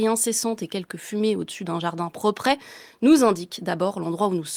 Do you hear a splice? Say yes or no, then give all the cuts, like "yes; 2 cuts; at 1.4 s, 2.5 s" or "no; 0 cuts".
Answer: no; 0 cuts